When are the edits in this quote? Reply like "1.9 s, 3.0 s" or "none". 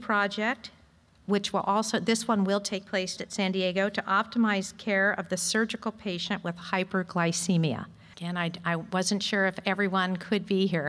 3.2 s, 8.1 s